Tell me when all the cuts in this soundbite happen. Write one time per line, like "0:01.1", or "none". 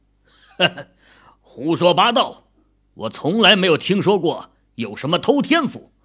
none